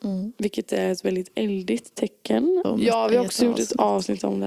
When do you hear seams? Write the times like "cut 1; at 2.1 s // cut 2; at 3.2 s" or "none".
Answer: cut 1; at 2.6 s